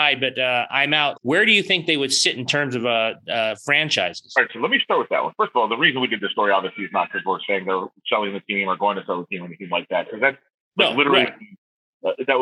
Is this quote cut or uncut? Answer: cut